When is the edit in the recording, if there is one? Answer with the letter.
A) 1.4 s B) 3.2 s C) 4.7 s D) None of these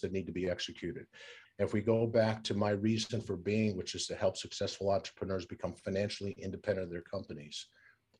A